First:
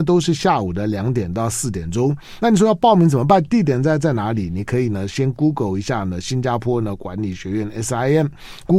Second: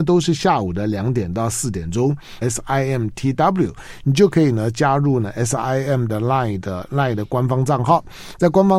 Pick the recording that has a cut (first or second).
second